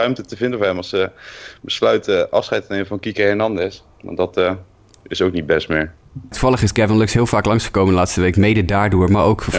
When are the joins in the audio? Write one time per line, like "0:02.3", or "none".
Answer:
0:06.3